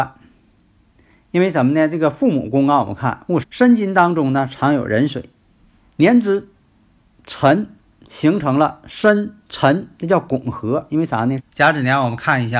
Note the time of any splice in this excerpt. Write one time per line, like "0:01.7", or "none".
0:03.4
0:05.8
0:11.4